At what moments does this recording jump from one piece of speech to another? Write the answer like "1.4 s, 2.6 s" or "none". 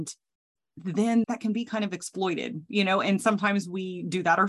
1.2 s